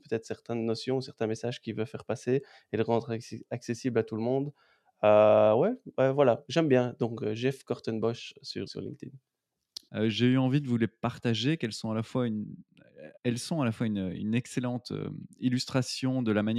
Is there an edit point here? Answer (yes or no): yes